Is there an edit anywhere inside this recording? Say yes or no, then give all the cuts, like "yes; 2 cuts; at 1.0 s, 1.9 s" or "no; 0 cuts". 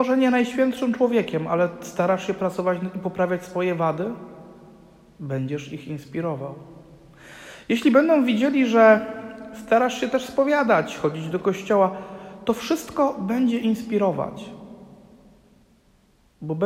no; 0 cuts